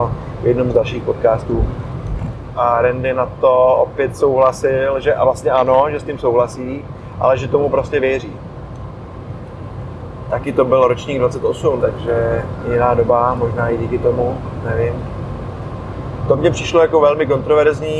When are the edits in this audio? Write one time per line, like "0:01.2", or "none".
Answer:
0:02.5
0:11.8

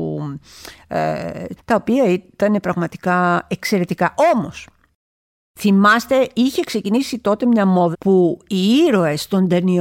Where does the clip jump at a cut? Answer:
0:01.6
0:07.9

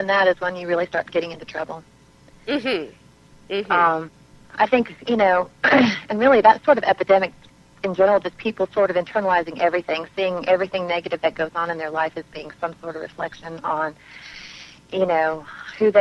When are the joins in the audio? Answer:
none

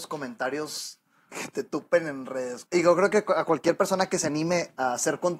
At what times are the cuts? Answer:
0:01.3
0:02.7

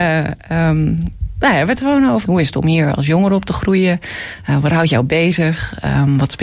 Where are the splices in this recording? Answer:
0:02.2

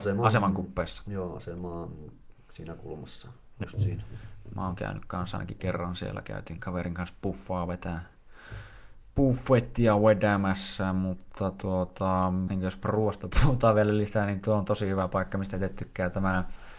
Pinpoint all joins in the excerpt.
0:03.6
0:12.5

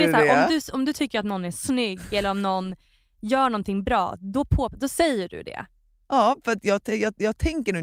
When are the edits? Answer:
none

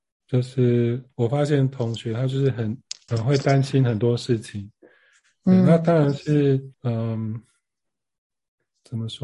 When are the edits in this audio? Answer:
0:03.1
0:06.7

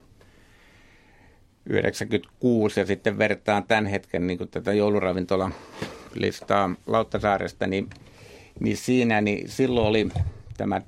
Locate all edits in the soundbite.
none

